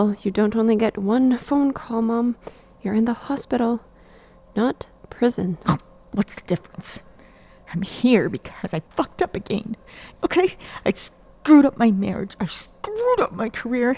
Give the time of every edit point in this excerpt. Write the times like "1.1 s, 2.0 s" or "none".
8.9 s, 10.1 s

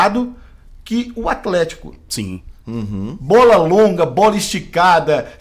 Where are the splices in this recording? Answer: none

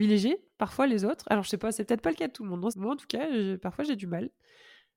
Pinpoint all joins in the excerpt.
2.7 s

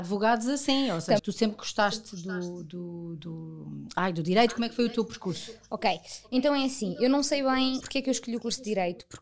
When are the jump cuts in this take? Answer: 1.2 s, 7.8 s

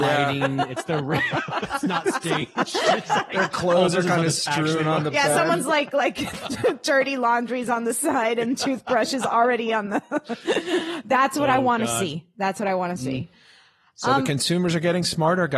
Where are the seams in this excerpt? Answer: none

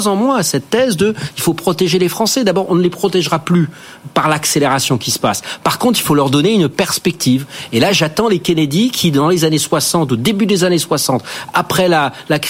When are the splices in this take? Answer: none

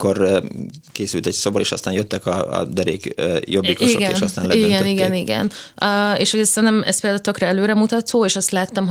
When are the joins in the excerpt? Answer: none

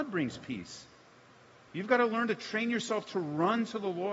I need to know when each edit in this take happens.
none

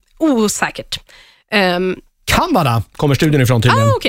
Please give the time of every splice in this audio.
none

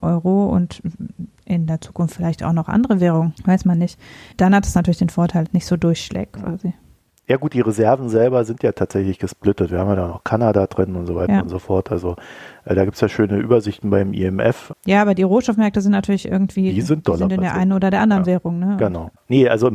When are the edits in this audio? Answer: 5.4 s

